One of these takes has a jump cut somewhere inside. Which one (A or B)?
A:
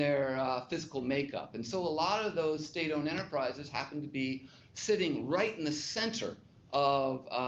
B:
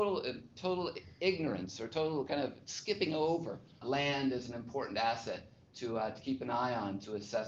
B